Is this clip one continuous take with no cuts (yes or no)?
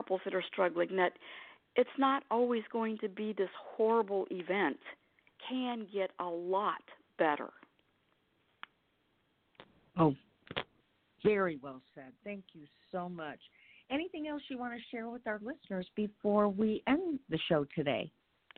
yes